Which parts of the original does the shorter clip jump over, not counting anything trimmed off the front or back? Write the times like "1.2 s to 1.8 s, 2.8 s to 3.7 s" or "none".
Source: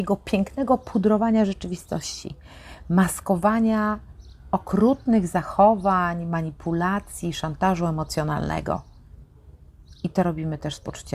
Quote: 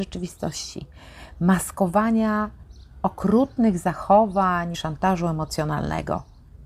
6.2 s to 7.3 s